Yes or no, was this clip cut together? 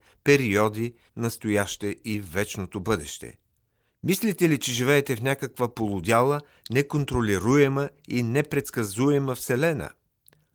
yes